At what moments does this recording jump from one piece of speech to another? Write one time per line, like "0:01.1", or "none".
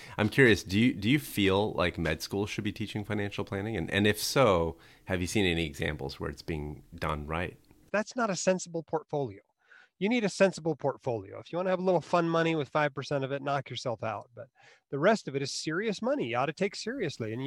0:07.9